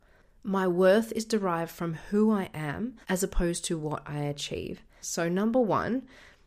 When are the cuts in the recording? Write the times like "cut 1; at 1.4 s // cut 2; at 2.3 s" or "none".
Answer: cut 1; at 3.0 s // cut 2; at 5.0 s